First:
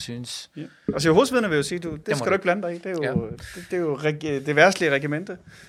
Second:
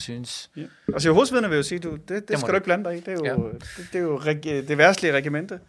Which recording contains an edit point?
first; 1 cut; at 2.0 s

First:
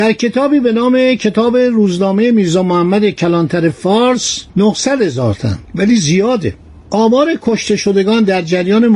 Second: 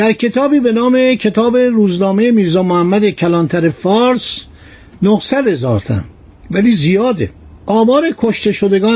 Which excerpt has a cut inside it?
first; 2 cuts; at 4.5 s, 5.7 s

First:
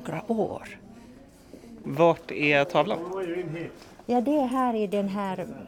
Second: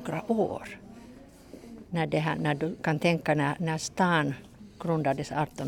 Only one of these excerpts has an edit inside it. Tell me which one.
first; 1 cut; at 1.8 s

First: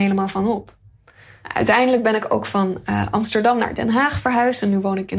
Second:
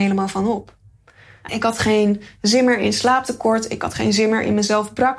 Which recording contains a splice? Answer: second; 1 cut; at 1.5 s

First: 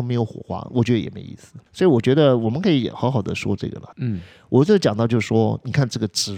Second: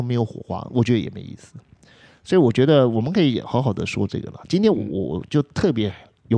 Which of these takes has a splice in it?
first; 2 cuts; at 1.7 s, 3.9 s

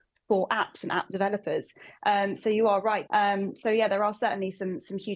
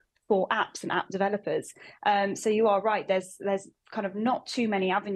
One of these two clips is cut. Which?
first; 1 cut; at 3.1 s

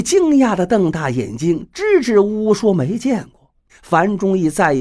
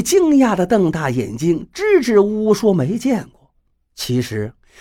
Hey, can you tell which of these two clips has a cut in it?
first; 1 cut; at 3.7 s

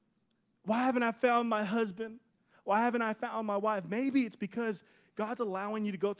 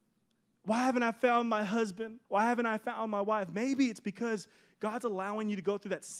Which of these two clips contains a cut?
second; 1 cut; at 2.2 s

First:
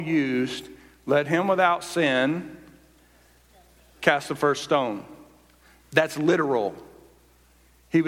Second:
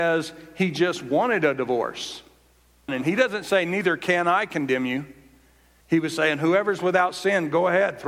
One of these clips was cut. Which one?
second; 2 cuts; at 2.9 s, 5.8 s

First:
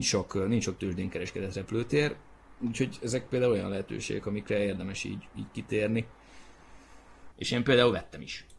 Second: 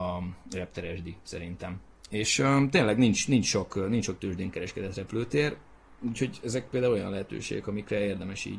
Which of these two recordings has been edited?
first; 1 cut; at 7.3 s

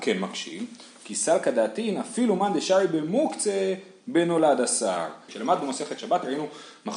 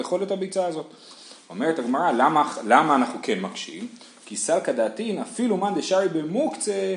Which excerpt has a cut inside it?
first; 1 cut; at 5.3 s

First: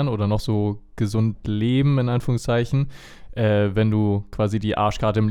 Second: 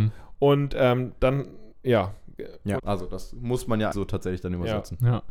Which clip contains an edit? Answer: second; 2 cuts; at 2.8 s, 3.9 s

